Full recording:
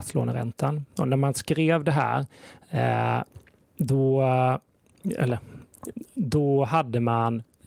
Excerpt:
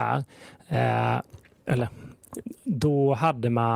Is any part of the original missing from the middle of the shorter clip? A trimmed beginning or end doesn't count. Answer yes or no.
yes